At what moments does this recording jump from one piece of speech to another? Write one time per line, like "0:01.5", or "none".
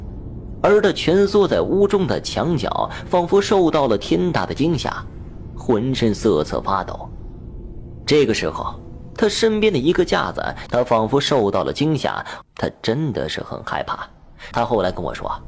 0:10.7
0:12.4
0:14.5